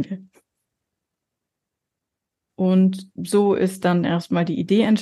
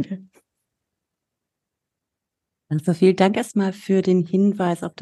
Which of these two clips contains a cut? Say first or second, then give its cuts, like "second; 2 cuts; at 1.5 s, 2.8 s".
first; 1 cut; at 2.5 s